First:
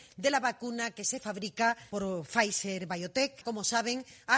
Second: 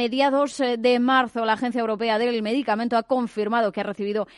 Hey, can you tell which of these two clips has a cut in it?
first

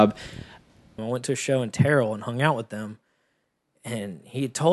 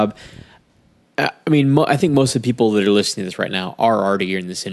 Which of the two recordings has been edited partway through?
first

